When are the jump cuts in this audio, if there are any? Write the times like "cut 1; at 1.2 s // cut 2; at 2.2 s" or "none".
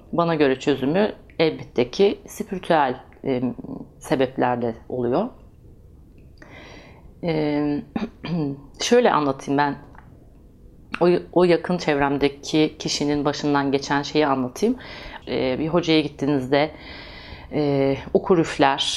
cut 1; at 15.2 s